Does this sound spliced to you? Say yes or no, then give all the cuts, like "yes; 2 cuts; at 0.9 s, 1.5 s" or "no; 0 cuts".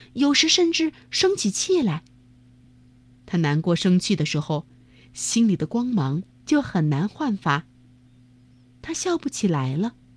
no; 0 cuts